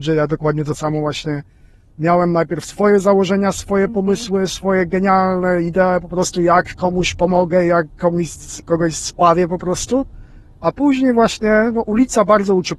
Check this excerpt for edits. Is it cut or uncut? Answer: uncut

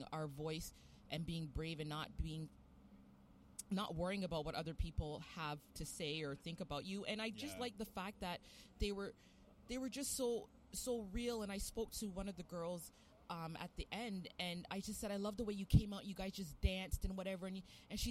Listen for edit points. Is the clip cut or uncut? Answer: uncut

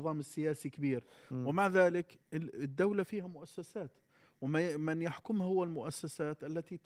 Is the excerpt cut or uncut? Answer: uncut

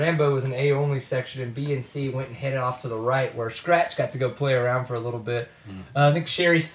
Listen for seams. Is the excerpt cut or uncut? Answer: uncut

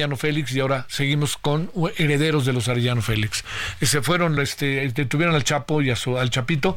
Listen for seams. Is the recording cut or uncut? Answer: uncut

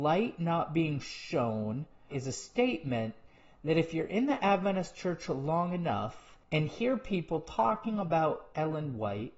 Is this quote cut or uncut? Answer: cut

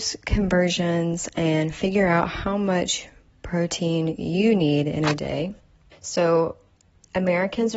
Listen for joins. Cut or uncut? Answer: cut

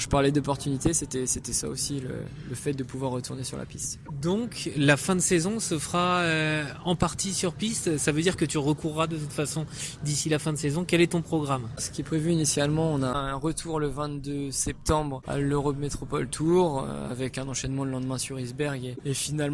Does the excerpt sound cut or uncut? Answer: uncut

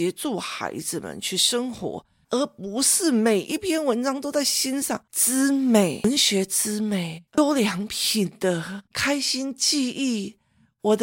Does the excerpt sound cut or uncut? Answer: cut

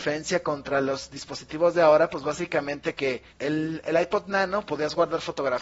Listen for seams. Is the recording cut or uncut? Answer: cut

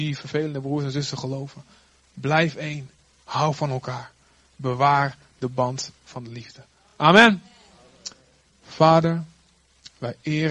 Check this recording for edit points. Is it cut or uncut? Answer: uncut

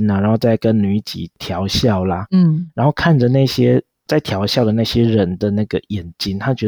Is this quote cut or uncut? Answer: uncut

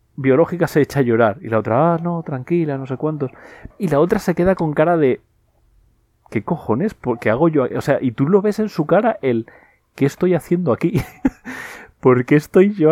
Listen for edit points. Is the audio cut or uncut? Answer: cut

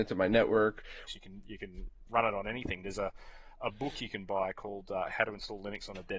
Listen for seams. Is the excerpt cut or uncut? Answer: cut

